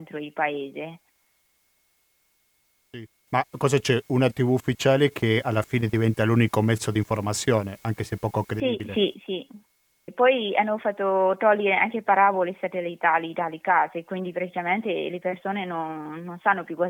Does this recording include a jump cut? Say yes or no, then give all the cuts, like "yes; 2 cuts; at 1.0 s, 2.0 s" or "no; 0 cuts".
yes; 2 cuts; at 3.3 s, 10.1 s